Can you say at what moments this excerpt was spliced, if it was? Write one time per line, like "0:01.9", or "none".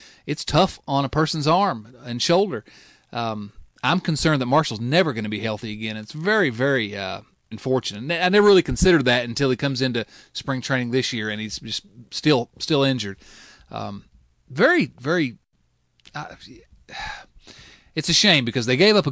0:07.5

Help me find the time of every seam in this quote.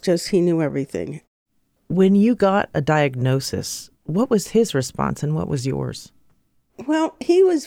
0:01.8
0:04.0

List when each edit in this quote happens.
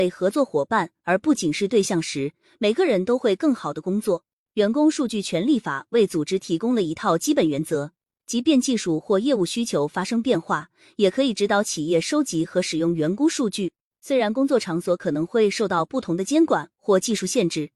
0:01.4

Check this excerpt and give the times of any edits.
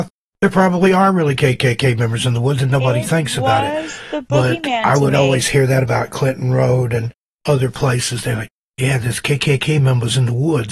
none

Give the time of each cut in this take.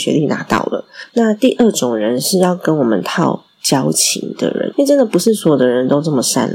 0:01.1
0:04.7

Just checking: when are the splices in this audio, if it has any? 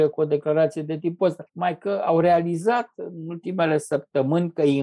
0:01.5

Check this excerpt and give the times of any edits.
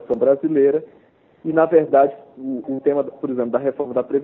0:02.6

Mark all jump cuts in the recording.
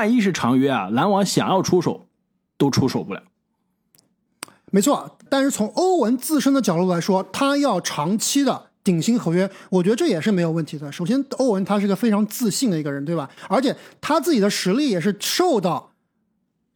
0:05.3

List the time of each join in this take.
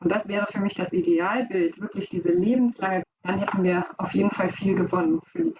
0:03.0

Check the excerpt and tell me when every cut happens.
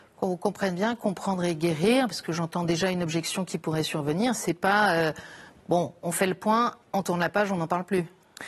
0:06.8

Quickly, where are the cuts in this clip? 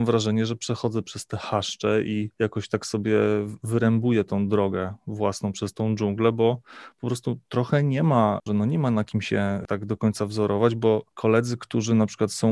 0:08.5

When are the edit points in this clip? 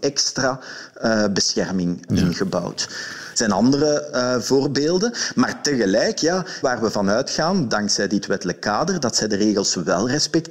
0:02.1
0:03.3
0:06.6

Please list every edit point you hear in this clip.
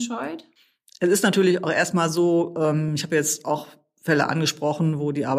none

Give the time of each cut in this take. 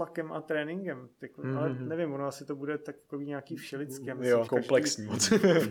0:04.5

